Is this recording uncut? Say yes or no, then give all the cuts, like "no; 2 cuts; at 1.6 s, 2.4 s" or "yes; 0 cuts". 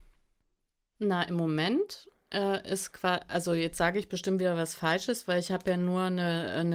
yes; 0 cuts